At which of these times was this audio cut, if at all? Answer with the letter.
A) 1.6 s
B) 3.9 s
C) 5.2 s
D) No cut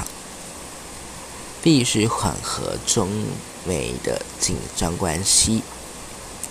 A